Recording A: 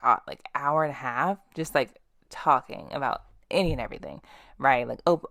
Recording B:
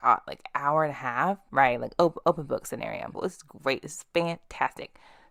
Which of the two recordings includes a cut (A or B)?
B